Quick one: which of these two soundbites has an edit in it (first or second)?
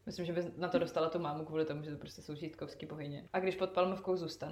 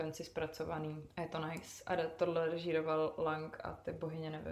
first